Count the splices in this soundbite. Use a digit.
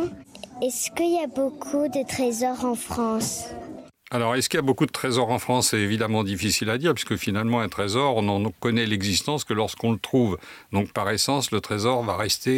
0